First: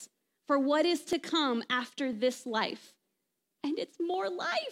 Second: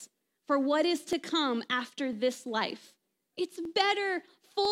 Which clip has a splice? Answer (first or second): second